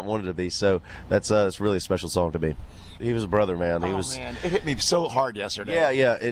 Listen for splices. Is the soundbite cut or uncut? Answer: cut